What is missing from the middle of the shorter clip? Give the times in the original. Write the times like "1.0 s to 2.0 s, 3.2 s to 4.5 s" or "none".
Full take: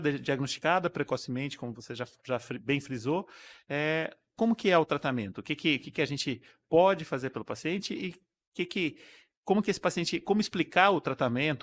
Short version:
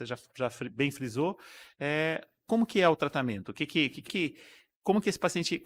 5.9 s to 8.7 s